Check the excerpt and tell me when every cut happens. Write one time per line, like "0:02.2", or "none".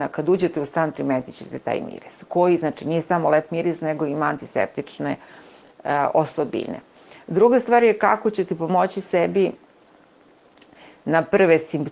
none